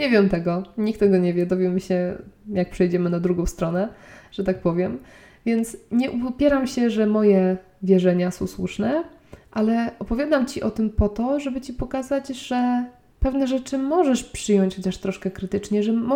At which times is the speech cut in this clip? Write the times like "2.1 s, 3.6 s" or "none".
none